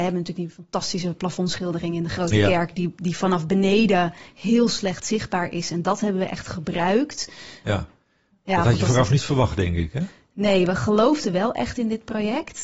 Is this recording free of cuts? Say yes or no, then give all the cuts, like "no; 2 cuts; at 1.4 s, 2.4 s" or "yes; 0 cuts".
no; 1 cut; at 7.6 s